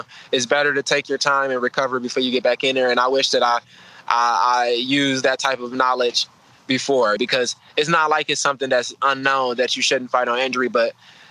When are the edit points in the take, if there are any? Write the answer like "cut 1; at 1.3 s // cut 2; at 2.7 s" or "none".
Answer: cut 1; at 7.2 s

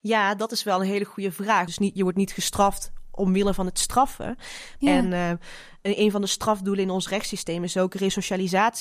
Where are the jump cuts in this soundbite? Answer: cut 1; at 1.7 s // cut 2; at 4.8 s

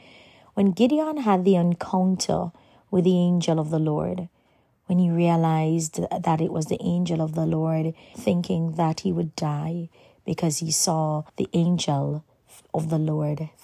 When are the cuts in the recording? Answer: cut 1; at 8.1 s // cut 2; at 11.3 s

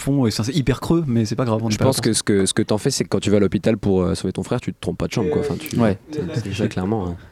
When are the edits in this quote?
none

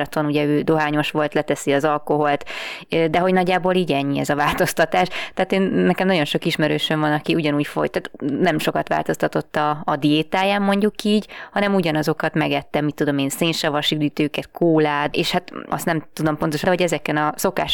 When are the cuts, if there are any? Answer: cut 1; at 15.1 s // cut 2; at 16.6 s

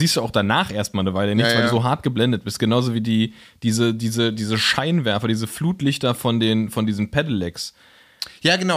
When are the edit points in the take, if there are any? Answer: none

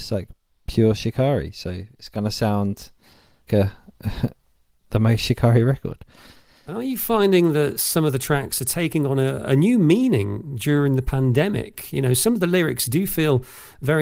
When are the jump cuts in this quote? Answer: cut 1; at 3.5 s

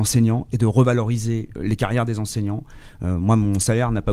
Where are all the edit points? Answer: cut 1; at 1.6 s

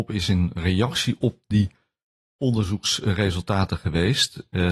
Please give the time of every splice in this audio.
none

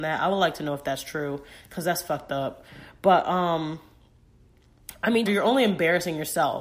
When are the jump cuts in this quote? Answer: cut 1; at 5.3 s

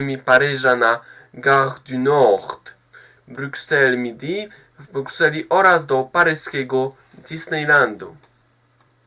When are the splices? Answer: cut 1; at 3.2 s

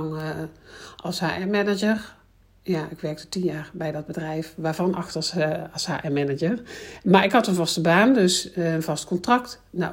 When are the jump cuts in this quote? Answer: none

